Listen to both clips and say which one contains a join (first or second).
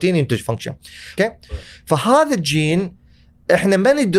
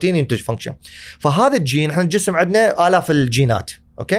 first